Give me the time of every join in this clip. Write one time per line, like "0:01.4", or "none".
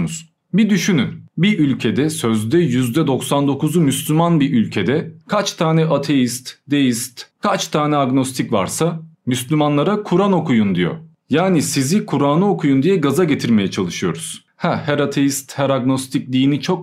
none